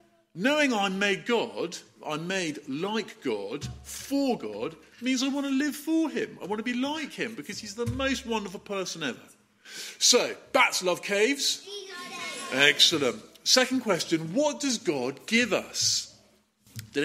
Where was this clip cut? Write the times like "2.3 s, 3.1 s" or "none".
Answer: none